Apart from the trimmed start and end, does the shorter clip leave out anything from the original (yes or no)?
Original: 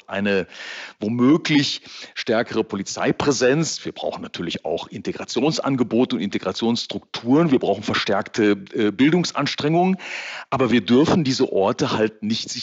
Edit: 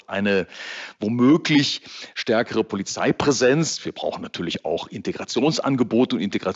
no